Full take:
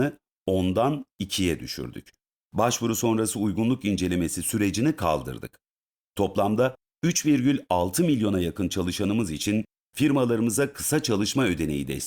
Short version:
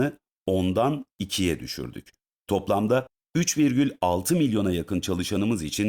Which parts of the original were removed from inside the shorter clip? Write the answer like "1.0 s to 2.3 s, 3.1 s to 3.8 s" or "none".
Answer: 2.4 s to 6.1 s